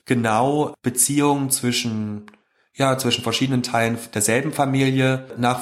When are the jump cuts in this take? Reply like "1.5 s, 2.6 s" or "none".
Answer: none